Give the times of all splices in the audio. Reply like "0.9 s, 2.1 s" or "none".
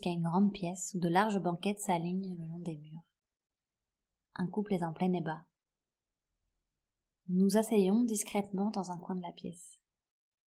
none